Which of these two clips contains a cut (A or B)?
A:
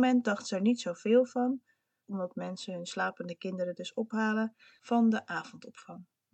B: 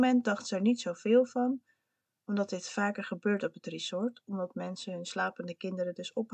A